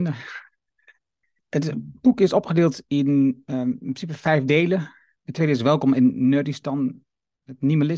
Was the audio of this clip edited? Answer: yes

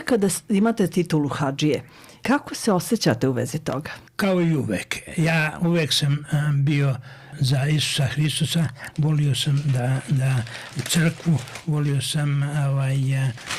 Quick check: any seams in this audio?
yes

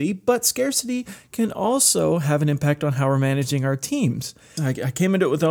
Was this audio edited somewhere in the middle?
yes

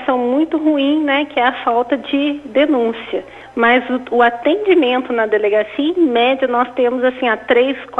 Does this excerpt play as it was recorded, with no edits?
yes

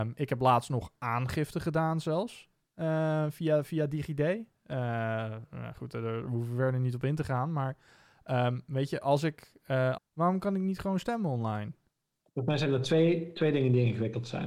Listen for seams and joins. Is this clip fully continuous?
no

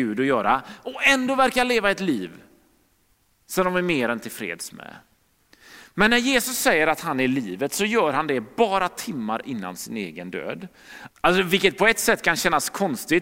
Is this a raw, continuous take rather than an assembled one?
no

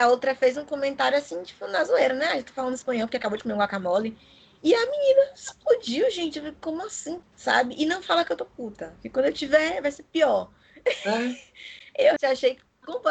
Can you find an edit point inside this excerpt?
yes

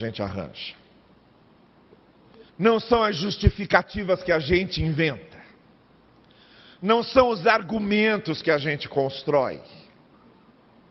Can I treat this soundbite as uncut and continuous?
no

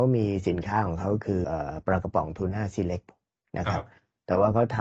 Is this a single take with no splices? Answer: no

